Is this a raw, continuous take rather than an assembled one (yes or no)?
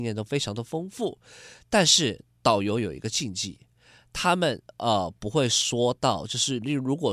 yes